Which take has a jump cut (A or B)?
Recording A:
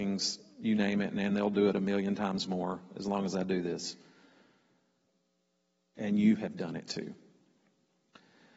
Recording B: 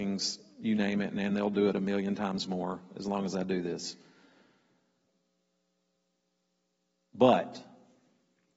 A